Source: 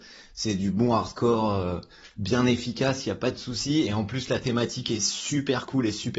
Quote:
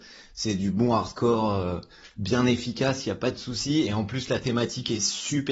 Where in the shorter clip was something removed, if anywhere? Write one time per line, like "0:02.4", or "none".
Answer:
none